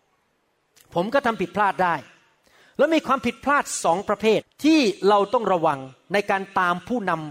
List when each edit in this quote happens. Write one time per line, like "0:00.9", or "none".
0:04.4